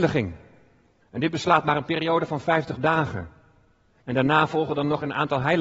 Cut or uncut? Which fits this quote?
cut